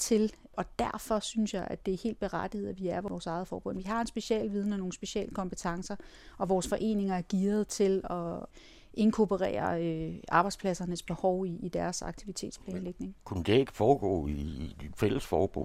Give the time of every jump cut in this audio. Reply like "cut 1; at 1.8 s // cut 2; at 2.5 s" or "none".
none